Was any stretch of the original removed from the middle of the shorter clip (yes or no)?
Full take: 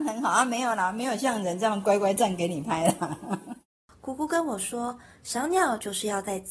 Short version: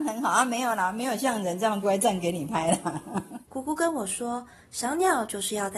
yes